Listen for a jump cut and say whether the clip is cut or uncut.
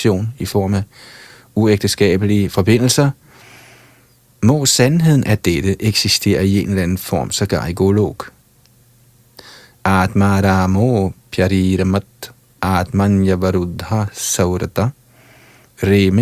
uncut